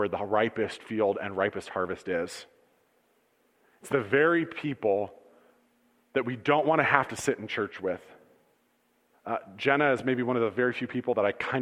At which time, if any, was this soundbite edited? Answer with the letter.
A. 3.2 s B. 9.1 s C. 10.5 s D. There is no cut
B